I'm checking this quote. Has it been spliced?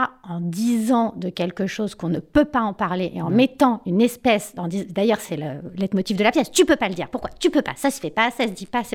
no; 0 cuts

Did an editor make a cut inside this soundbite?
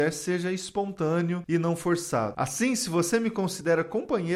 yes; 1 cut; at 2.3 s

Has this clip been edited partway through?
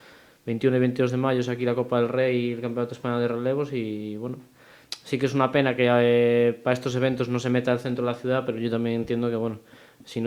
no; 0 cuts

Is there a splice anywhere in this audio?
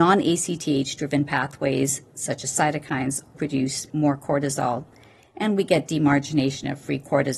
yes; 1 cut; at 3.3 s

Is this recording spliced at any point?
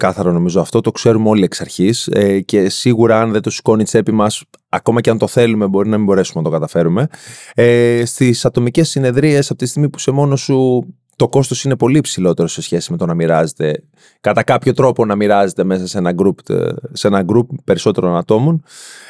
no; 0 cuts

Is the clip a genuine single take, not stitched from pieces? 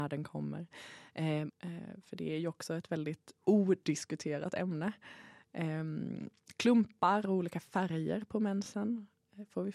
no; 1 cut; at 1.5 s

